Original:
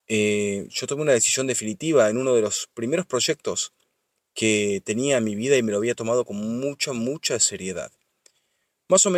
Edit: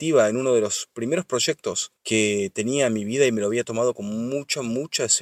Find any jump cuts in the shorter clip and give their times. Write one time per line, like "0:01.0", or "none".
0:02.0

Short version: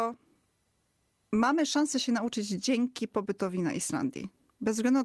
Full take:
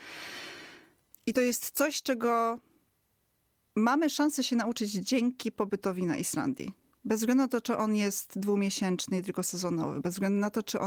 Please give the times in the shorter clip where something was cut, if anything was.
none

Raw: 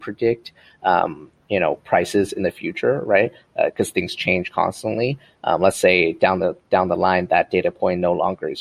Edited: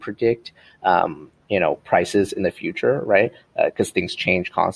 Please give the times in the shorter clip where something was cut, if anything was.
none

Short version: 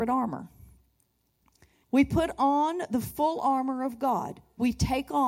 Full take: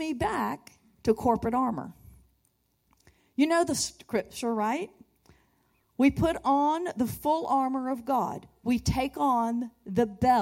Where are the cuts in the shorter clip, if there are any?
0:01.8

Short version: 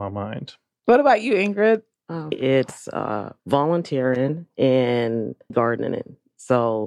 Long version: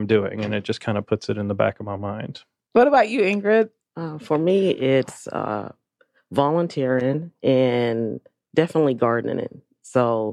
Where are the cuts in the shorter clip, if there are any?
0:02.3
0:03.4
0:05.5

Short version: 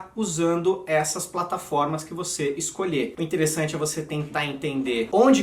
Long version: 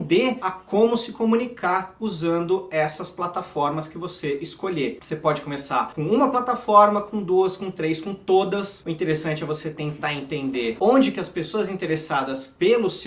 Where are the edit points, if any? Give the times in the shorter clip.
0:03.2

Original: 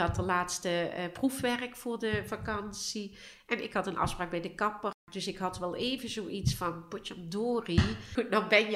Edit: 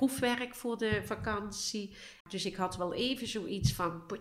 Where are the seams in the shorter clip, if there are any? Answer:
0:02.2

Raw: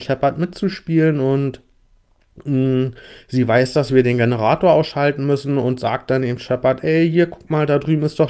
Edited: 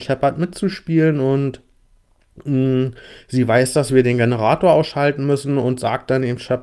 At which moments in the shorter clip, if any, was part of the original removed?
none

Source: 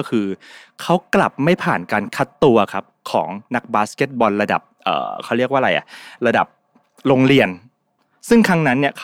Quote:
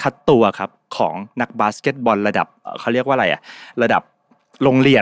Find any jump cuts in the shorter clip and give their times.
0:02.7

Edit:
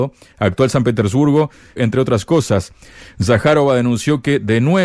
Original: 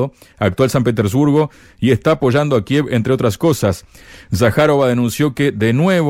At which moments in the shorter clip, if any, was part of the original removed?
0:01.8

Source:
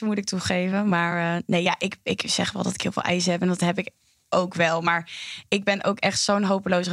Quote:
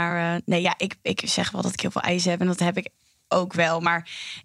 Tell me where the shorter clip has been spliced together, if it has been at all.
none

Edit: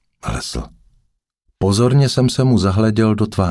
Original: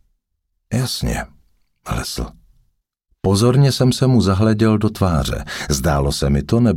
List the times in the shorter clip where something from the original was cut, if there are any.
none

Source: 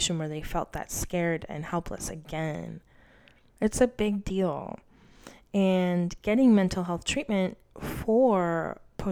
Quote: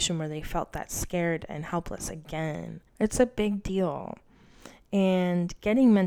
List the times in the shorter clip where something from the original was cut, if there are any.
0:02.9

